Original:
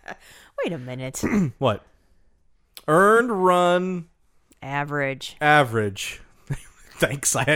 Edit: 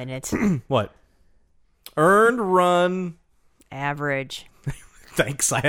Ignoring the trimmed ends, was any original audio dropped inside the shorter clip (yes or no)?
yes